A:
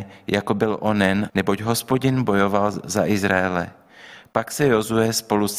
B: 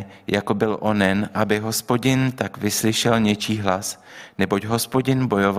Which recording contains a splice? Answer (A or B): A